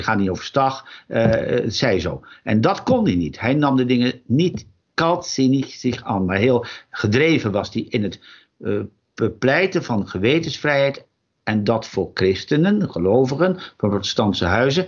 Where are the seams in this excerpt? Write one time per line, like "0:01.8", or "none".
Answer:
none